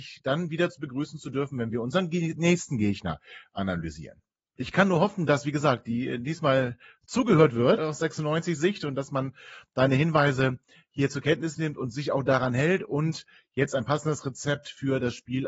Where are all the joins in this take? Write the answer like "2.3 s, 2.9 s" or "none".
4.6 s, 7.8 s